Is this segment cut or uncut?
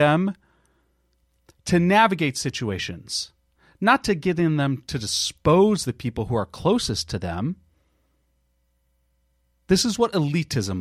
uncut